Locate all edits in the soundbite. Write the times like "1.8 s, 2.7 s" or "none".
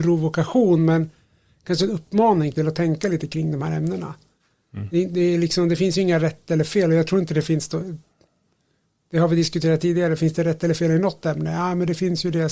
none